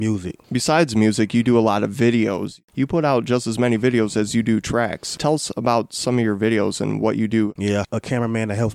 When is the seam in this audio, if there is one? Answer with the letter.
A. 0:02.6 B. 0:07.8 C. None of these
B